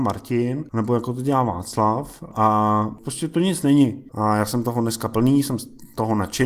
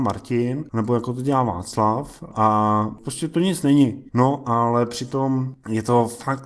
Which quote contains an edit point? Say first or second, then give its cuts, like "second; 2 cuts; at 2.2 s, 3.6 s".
first; 1 cut; at 4.1 s